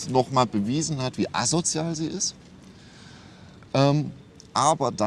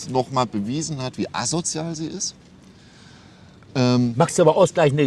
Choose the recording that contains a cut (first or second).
second